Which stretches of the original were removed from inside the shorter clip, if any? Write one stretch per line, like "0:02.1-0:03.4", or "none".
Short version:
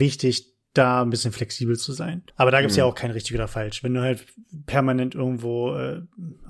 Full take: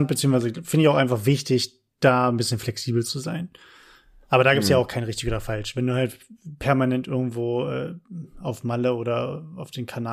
0:03.6-0:04.2